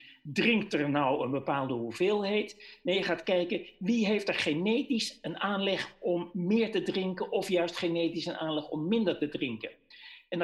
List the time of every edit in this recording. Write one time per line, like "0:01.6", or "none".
none